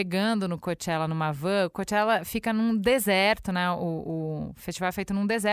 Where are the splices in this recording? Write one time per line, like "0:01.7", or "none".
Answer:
none